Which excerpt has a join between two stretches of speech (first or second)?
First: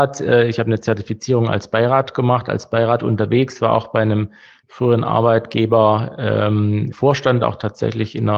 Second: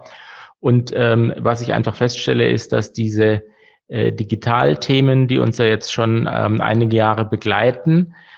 first